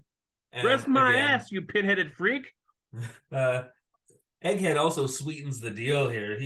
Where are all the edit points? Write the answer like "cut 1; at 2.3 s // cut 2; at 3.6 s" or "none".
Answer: cut 1; at 3.2 s